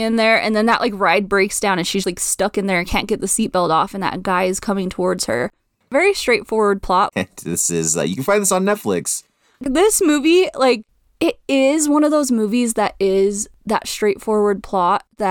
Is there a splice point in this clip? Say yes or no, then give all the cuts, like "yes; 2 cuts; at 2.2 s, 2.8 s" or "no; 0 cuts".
yes; 2 cuts; at 2.0 s, 7.1 s